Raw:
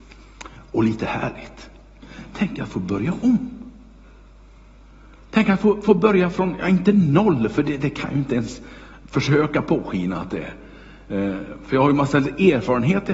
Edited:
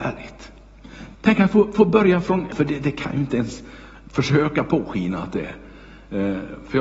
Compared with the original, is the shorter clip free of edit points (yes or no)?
no